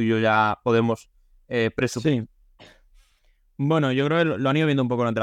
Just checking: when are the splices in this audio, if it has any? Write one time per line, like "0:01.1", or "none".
none